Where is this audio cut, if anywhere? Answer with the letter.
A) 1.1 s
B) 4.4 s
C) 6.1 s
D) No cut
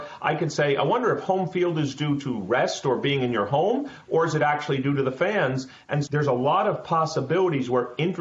C